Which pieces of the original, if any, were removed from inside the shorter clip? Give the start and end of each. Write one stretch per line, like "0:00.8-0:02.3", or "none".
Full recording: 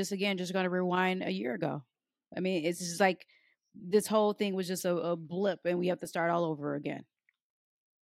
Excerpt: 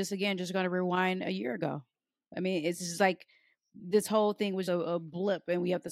0:04.7-0:04.8